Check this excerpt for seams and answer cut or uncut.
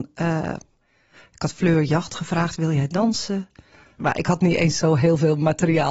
cut